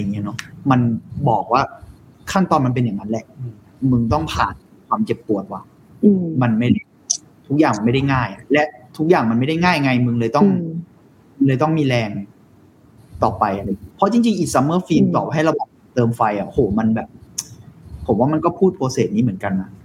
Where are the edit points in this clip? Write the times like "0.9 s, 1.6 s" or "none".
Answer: none